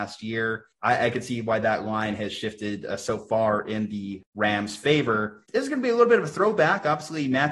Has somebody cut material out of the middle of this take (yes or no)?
no